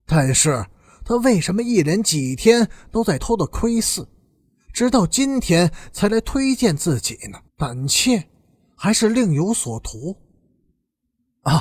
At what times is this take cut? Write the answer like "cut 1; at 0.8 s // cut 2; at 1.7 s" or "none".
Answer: cut 1; at 3.2 s // cut 2; at 7.5 s